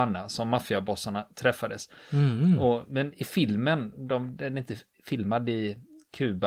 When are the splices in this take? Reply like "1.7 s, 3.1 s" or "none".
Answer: none